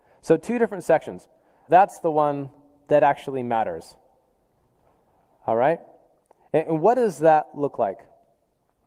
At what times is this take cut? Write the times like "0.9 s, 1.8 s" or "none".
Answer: 1.7 s

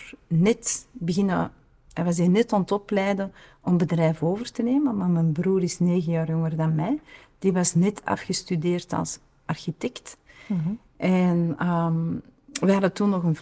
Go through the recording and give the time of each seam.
none

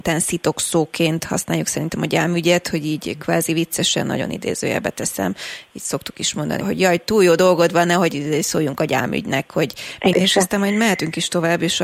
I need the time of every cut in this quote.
6.6 s, 10.1 s

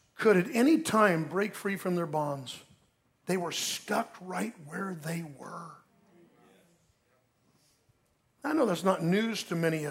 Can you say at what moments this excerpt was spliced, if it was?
3.2 s

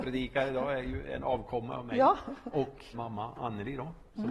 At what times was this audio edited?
2.9 s

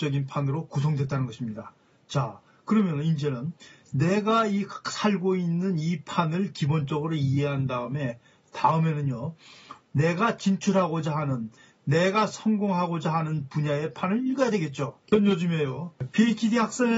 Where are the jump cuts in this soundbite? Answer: 9.9 s

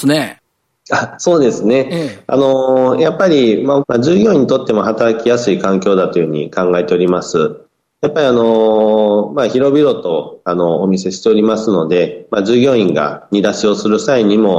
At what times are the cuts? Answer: 3.8 s

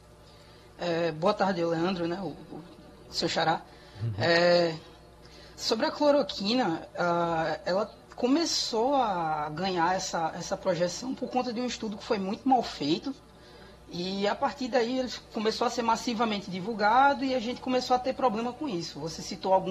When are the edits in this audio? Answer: none

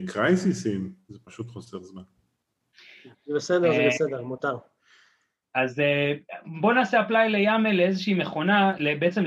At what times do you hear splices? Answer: 3.1 s

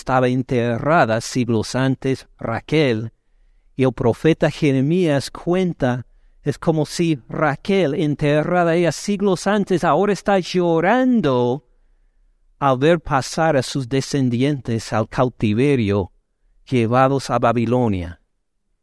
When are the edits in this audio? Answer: none

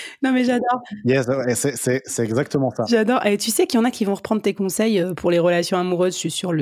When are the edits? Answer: none

